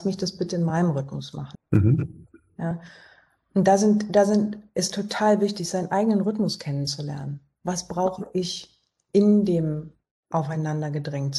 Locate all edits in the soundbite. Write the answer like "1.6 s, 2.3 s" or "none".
1.5 s